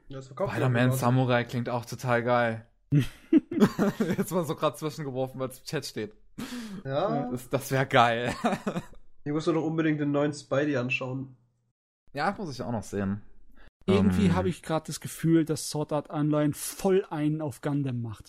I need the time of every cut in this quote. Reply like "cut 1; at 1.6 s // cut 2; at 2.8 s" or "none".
cut 1; at 13.8 s